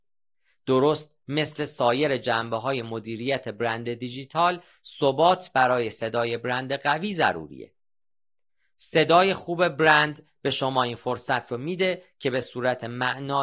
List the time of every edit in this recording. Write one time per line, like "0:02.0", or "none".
none